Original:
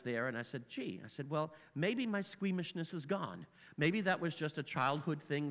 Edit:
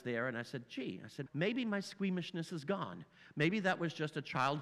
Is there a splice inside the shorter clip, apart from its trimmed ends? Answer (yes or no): yes